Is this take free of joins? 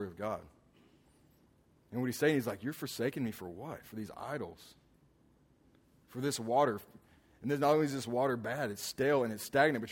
yes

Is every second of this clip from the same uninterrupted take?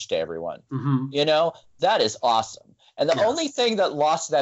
yes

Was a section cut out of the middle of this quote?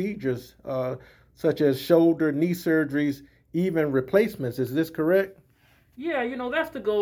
no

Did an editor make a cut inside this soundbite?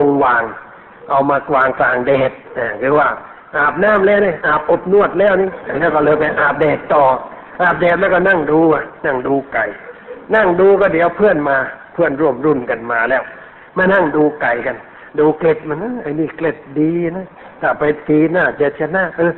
no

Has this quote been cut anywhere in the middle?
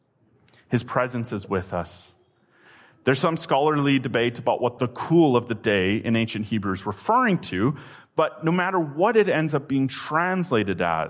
yes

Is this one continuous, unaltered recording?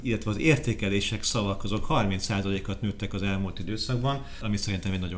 yes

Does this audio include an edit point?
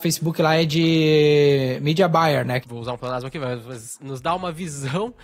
yes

